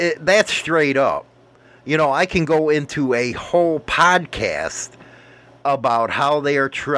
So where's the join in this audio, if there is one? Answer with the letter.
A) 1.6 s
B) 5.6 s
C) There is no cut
C